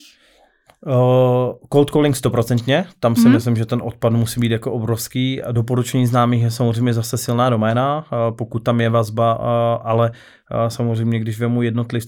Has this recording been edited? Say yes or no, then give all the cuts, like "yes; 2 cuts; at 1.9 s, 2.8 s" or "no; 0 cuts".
no; 0 cuts